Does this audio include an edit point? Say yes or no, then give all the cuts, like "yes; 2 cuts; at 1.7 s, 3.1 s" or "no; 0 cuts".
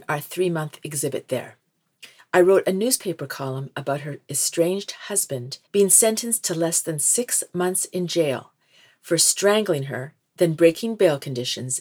yes; 2 cuts; at 2.2 s, 5.7 s